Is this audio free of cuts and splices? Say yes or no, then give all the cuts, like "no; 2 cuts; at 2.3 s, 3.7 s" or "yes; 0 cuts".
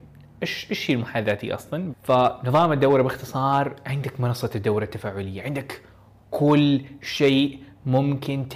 no; 1 cut; at 1.9 s